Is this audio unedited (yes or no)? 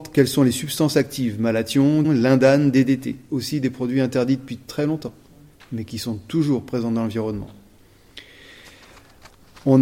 no